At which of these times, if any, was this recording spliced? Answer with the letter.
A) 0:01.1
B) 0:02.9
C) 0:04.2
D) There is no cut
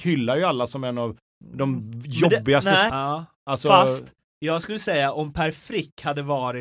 B